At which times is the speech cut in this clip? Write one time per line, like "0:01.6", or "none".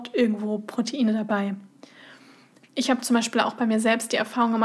0:02.7